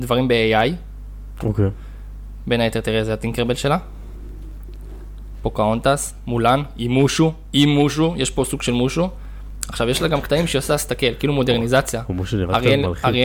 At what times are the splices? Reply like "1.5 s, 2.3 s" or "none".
none